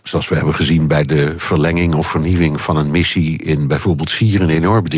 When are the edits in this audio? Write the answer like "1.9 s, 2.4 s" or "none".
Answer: none